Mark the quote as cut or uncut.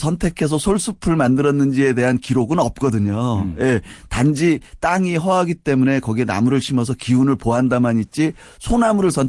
uncut